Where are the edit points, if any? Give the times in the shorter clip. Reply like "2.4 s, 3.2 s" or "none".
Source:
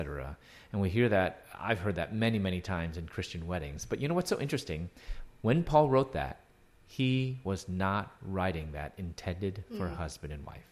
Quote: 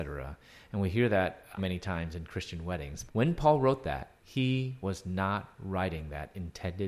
1.6 s, 3.1 s, 4.2 s